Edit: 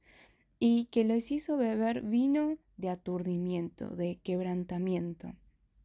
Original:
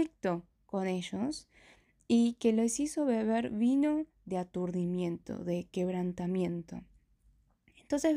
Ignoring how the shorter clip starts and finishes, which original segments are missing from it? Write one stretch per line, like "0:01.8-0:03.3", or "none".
none

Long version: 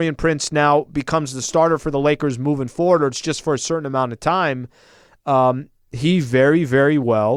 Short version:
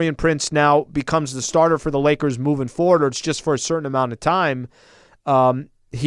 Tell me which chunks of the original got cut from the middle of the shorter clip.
none

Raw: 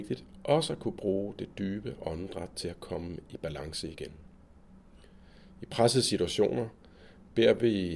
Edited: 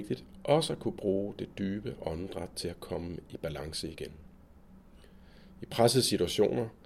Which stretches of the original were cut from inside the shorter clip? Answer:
none

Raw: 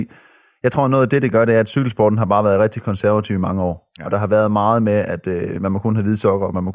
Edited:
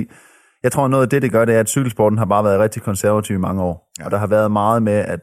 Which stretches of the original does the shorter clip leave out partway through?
none

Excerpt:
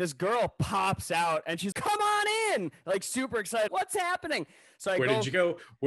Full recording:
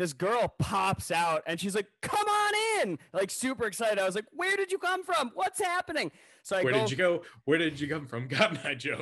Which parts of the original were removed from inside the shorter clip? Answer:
0:01.7-0:02.0
0:03.9-0:05.3

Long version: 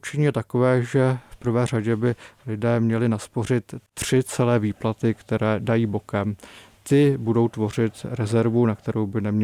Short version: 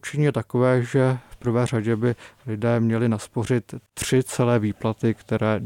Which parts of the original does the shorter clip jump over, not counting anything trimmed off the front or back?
none

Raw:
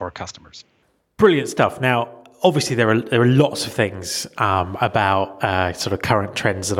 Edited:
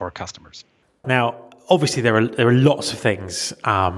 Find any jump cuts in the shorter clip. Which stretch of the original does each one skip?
0:01.0-0:01.8

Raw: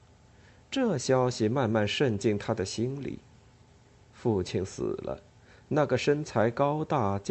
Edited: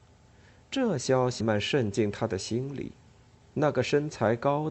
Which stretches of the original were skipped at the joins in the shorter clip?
0:01.4-0:01.7
0:03.8-0:05.6

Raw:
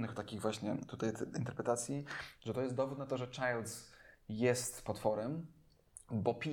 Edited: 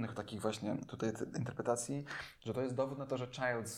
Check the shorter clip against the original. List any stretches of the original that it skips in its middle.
none

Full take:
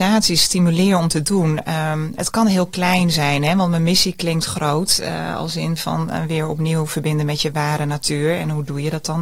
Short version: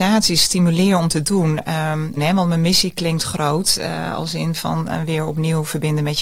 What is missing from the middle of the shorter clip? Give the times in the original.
0:02.2-0:03.4

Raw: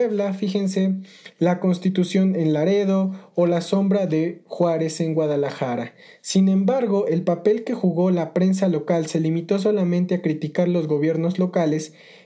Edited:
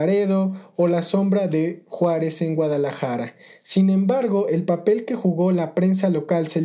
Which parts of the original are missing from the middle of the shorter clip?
none

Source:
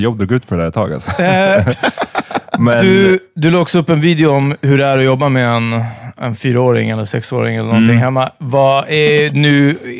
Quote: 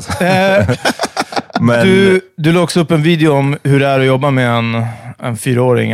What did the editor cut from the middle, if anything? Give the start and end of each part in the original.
none

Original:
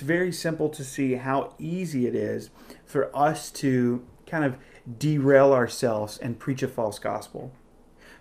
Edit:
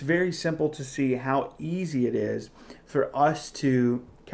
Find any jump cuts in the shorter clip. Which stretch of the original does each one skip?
none

